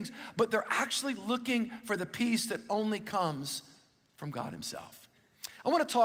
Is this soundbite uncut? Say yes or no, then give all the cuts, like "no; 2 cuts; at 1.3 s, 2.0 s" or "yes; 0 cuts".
yes; 0 cuts